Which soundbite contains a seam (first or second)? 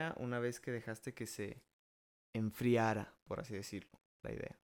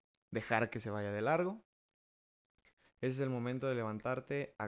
second